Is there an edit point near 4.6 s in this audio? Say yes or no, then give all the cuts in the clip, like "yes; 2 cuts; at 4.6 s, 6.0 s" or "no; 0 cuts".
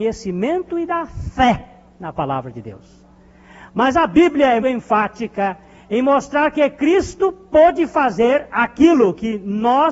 yes; 1 cut; at 4.6 s